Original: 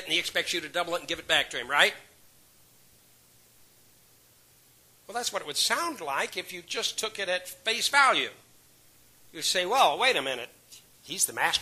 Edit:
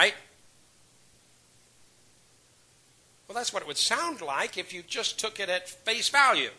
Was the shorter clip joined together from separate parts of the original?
no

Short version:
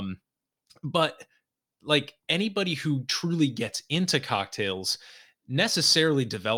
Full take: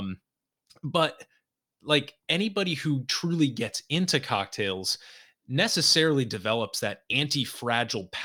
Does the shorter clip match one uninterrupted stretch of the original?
yes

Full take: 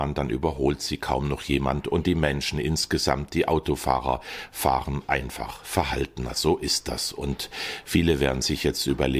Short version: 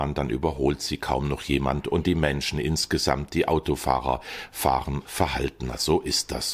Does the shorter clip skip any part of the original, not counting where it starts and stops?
yes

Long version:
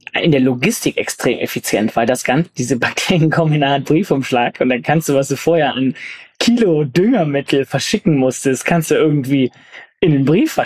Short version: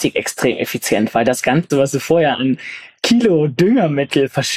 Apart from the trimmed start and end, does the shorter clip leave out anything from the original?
yes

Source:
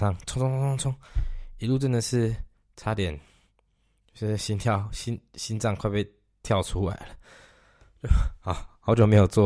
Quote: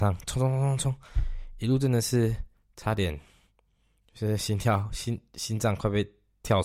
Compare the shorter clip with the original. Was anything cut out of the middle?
no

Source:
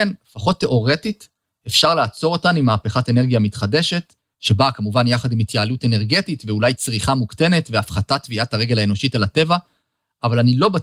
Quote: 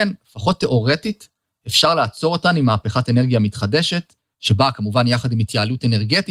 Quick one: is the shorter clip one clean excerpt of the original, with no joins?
yes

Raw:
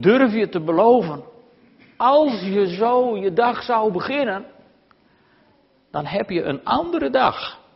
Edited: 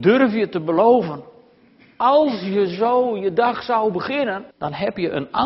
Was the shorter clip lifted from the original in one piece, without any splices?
no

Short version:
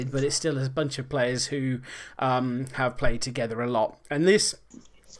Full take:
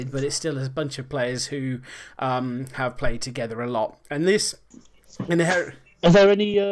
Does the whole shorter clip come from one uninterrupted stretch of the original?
yes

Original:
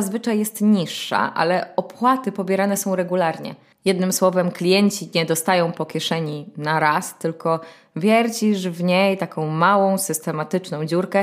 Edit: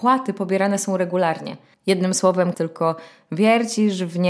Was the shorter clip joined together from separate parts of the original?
yes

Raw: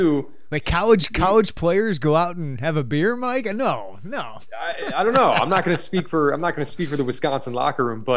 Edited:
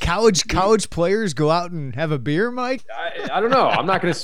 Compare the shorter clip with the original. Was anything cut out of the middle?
yes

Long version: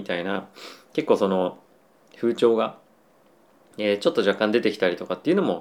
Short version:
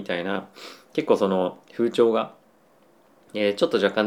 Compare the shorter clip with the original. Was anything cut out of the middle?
yes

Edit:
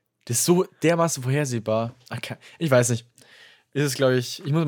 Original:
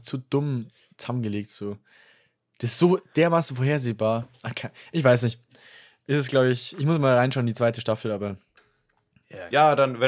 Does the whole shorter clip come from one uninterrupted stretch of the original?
yes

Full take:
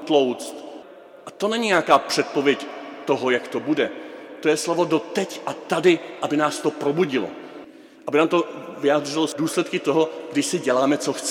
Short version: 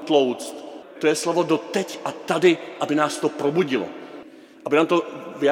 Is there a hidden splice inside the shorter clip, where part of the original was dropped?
yes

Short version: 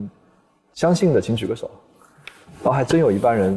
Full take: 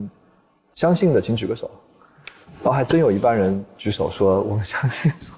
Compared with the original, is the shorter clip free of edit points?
yes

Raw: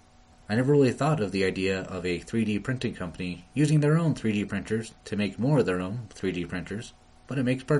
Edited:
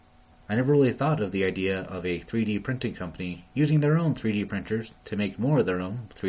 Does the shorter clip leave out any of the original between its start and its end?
no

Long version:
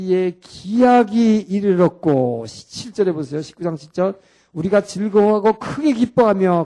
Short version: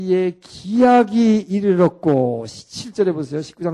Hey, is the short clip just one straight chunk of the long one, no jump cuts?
yes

